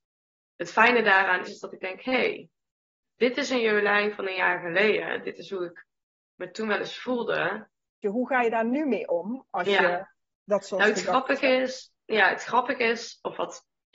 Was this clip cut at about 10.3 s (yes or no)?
no